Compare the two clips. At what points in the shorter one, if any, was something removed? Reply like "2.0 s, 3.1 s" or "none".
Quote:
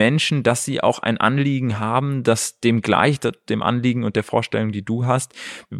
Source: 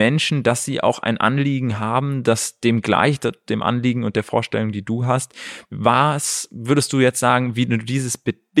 none

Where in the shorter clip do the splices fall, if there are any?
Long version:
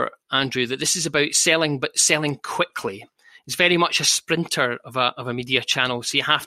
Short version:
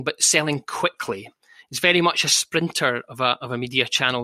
none

